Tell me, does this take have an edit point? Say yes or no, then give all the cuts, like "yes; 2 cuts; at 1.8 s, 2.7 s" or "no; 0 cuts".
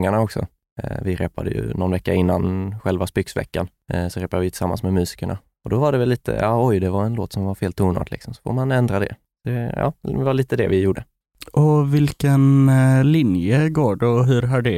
no; 0 cuts